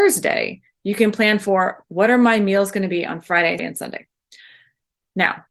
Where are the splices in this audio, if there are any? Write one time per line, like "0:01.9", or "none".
0:03.6